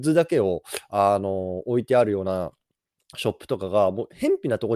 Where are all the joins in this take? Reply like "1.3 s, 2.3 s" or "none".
none